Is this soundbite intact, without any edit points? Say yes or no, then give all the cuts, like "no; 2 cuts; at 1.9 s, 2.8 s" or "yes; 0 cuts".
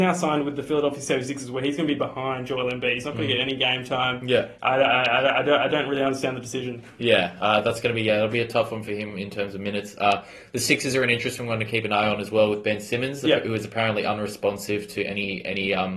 yes; 0 cuts